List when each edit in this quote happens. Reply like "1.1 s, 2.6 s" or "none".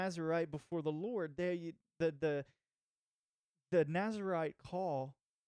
none